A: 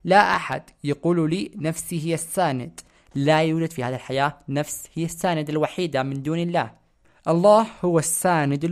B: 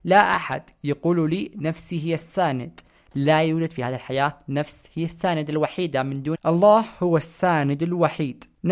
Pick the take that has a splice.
B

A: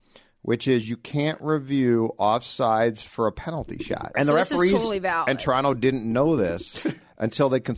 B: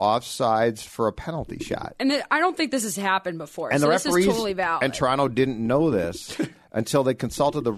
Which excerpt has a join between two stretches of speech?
A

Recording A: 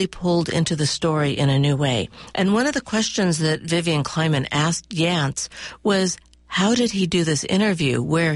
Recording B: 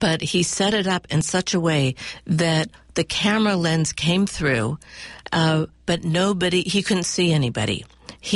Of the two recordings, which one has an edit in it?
A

